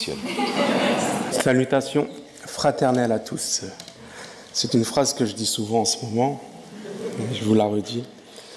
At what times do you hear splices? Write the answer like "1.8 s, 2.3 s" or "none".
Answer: 1.3 s